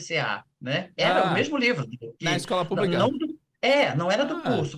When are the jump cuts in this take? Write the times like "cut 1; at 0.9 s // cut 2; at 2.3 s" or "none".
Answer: none